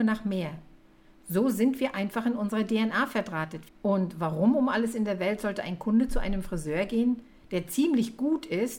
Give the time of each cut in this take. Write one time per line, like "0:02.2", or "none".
0:03.7